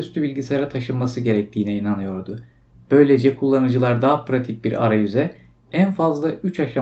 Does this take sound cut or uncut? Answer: uncut